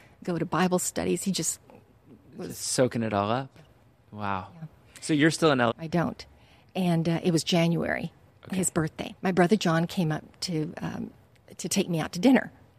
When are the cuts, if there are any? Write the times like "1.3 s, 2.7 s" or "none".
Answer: 5.7 s, 9.2 s